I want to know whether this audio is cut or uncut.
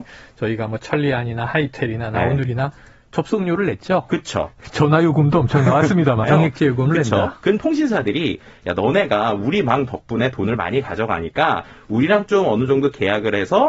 cut